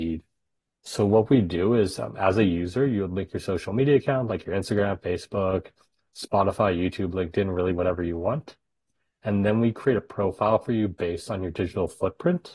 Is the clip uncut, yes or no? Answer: yes